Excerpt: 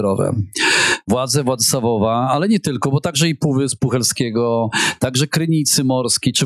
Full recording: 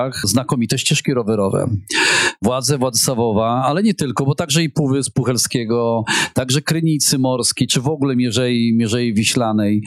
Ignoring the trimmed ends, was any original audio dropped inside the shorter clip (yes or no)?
no